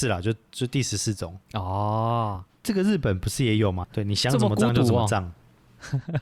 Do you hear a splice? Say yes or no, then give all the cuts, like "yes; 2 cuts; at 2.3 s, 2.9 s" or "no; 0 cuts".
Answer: yes; 2 cuts; at 1.4 s, 3.8 s